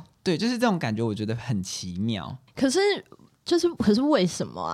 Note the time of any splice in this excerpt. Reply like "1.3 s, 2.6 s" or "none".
2.5 s